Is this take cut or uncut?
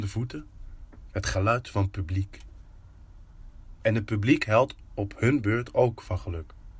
cut